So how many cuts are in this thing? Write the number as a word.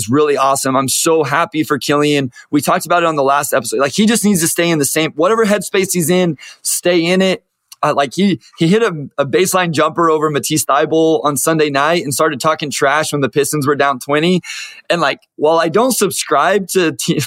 zero